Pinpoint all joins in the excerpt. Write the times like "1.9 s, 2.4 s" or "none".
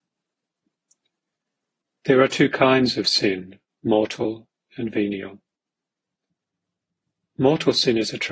none